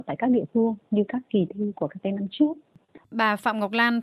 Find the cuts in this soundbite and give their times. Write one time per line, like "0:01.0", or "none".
0:03.0